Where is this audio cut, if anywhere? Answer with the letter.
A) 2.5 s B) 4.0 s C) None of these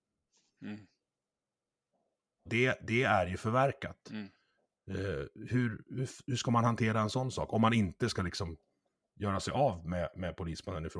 A